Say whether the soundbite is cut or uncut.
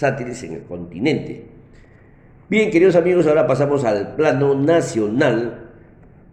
uncut